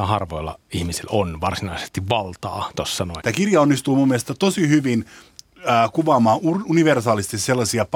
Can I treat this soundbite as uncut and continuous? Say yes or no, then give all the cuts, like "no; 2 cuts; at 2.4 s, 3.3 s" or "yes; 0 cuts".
no; 1 cut; at 3.2 s